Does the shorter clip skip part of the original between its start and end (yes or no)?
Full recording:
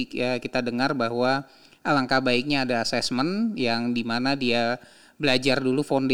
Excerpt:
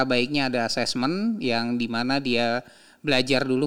no